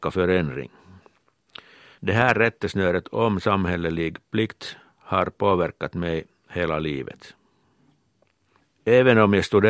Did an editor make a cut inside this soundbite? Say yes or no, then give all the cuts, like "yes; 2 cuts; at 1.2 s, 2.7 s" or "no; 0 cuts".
no; 0 cuts